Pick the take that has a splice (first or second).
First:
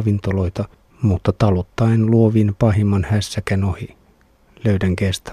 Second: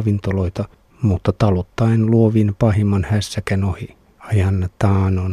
second